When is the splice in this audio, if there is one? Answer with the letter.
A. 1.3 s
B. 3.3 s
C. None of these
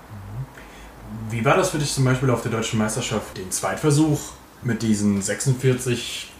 B